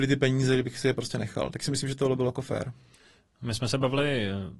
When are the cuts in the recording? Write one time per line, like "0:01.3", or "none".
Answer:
none